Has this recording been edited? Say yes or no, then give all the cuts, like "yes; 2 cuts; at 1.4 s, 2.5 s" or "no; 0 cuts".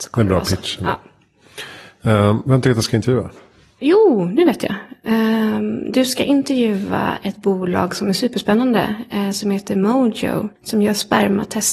yes; 1 cut; at 10.6 s